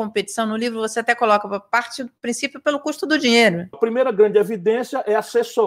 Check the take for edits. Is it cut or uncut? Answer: cut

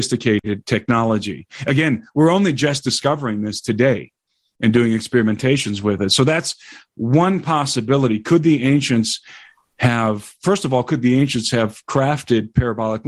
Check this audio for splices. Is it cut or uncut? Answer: uncut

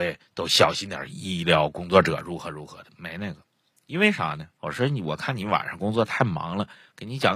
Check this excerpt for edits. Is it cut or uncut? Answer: cut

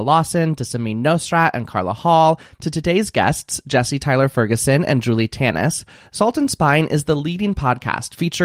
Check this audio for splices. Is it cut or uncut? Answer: uncut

